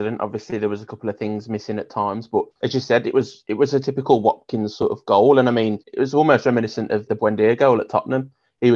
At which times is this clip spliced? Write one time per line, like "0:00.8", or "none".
0:02.5
0:05.8
0:07.1

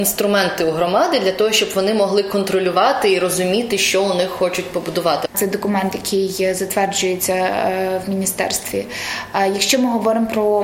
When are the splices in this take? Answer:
0:05.3

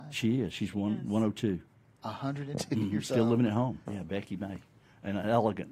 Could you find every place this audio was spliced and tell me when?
0:03.9

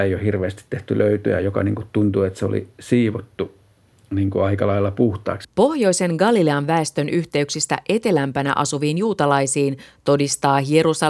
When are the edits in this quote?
0:05.4

